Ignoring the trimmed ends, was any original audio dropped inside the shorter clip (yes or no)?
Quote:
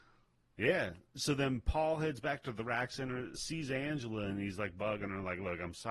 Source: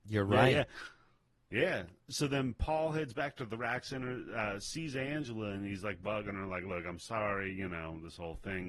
yes